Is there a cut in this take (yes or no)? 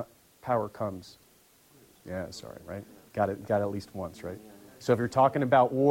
no